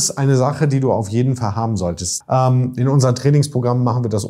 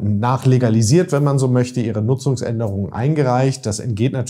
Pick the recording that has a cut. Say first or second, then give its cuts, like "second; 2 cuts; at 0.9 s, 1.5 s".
first; 1 cut; at 2.2 s